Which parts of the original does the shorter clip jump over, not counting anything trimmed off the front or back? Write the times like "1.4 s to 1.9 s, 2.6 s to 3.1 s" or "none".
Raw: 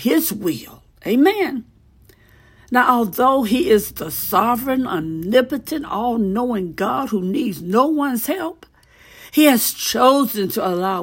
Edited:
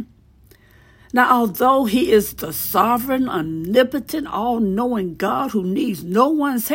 none